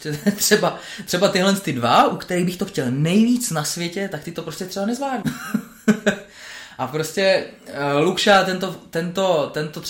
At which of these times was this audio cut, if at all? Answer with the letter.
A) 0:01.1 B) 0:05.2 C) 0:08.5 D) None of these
B